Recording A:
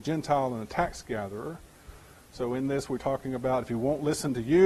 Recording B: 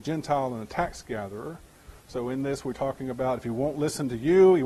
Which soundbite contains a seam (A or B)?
B